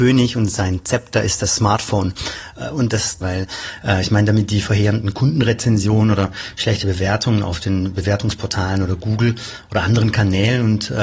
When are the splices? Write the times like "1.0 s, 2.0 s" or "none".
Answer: 3.2 s